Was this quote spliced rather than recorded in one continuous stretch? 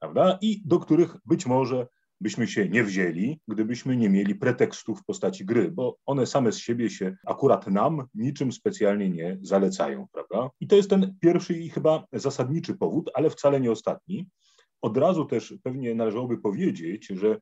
no; 0 cuts

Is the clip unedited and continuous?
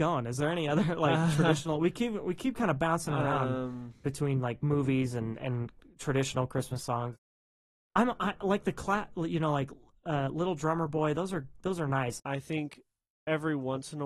no; 1 cut; at 12.2 s

